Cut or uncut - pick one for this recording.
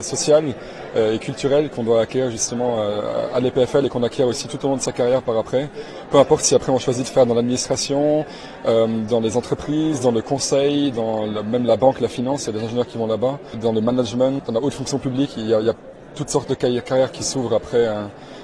uncut